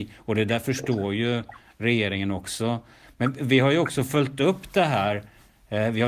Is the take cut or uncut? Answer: uncut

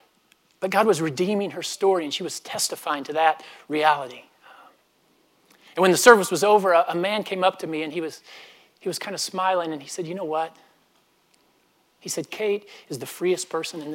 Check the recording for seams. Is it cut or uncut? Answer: uncut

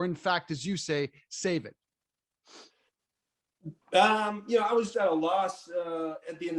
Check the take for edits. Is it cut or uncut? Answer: cut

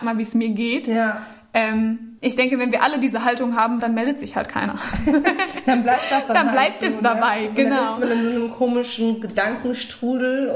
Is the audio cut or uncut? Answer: cut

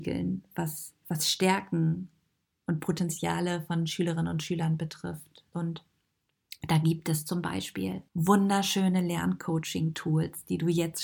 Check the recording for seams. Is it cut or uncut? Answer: cut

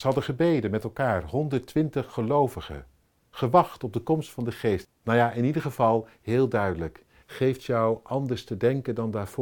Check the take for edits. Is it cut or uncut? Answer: cut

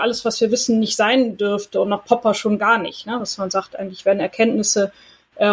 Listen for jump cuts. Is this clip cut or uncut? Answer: uncut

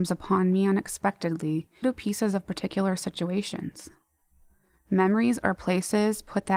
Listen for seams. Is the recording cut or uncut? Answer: cut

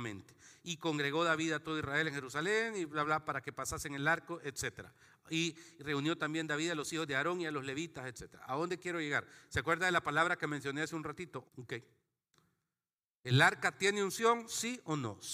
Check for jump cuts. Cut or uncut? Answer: cut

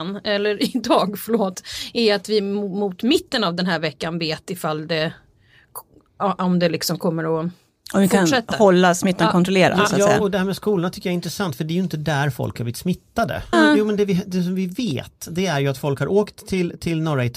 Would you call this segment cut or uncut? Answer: cut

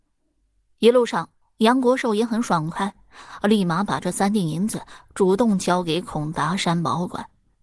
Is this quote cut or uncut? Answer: cut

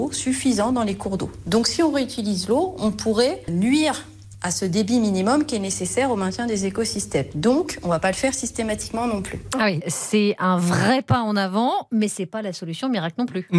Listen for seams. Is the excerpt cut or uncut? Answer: cut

